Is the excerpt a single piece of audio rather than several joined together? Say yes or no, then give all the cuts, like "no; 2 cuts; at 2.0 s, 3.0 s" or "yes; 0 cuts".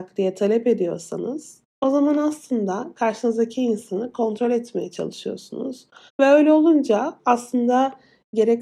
no; 1 cut; at 6.1 s